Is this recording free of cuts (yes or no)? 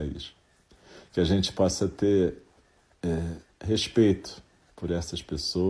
yes